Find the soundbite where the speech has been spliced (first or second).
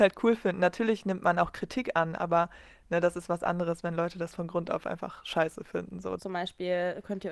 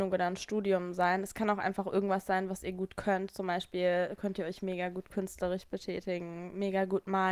first